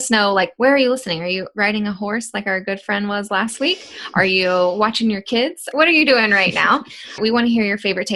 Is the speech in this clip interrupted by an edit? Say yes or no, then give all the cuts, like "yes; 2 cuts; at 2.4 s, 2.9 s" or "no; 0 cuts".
yes; 2 cuts; at 5.7 s, 7.2 s